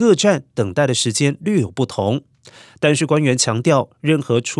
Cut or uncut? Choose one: uncut